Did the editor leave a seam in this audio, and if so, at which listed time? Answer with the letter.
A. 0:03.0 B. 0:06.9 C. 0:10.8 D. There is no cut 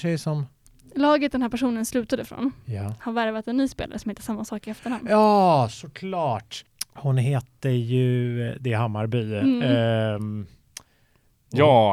D